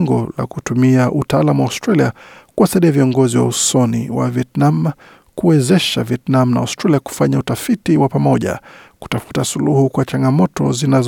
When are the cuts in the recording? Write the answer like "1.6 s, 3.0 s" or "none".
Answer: none